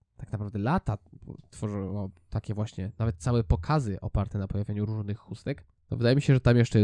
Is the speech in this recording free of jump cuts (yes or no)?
no